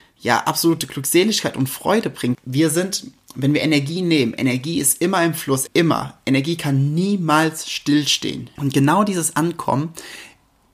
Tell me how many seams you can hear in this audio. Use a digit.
3